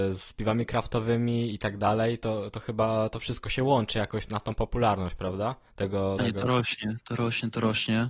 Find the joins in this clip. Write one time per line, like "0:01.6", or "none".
0:06.2